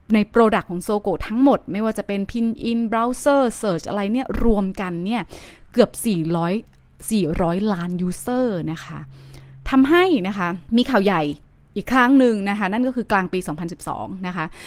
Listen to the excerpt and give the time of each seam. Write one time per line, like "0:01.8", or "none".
0:10.7